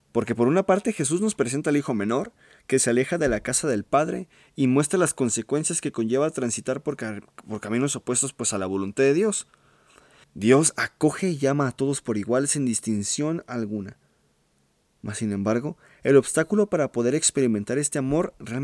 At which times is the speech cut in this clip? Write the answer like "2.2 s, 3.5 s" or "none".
10.2 s